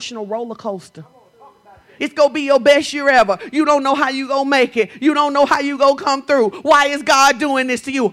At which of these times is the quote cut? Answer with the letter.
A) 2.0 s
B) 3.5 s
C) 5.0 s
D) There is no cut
A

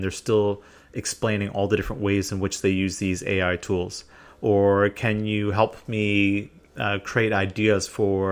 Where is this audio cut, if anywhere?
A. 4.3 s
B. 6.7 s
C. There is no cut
A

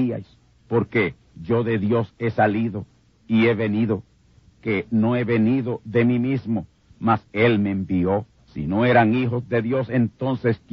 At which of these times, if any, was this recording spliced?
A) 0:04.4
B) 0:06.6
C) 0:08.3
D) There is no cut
C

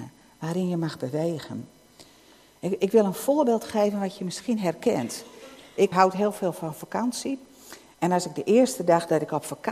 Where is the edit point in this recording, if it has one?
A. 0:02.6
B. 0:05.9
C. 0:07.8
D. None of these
B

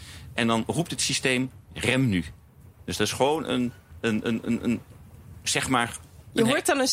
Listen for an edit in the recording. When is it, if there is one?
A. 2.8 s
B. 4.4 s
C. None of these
B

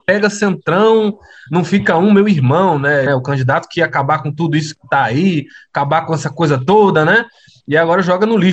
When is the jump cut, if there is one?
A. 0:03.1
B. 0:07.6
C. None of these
A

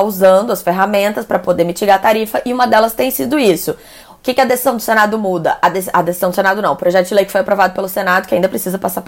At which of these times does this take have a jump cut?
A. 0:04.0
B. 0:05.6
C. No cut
A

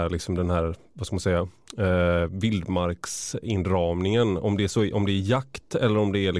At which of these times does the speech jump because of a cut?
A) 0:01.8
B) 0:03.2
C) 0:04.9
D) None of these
D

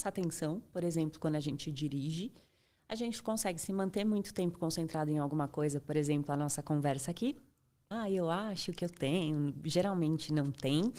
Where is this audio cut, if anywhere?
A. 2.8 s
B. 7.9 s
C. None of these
B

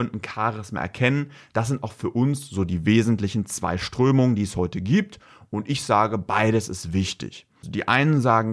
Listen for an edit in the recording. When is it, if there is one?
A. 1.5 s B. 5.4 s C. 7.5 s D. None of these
D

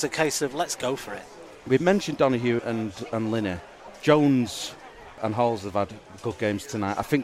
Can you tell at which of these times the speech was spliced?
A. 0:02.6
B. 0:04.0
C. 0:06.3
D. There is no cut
A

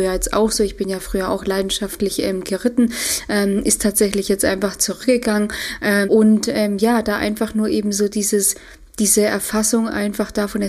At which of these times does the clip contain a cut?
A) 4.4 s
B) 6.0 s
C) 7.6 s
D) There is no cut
B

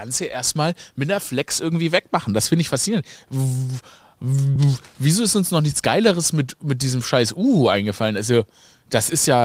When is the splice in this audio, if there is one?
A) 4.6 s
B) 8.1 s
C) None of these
C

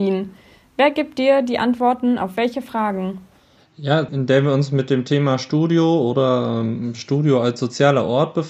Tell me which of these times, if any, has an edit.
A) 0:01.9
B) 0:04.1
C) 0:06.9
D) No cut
B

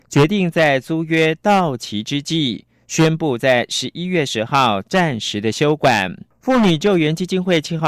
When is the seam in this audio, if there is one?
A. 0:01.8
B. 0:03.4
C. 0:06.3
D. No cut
C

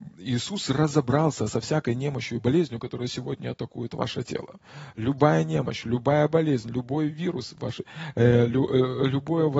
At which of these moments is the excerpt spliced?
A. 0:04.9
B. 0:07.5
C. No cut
C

